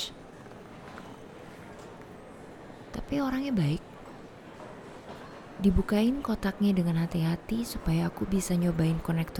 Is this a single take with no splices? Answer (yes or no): yes